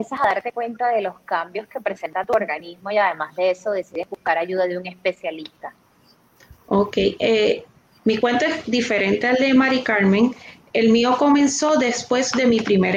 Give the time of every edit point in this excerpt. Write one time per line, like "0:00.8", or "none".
0:08.0